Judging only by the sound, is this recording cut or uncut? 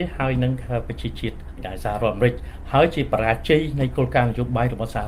cut